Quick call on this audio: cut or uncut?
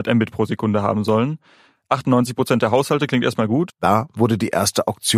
cut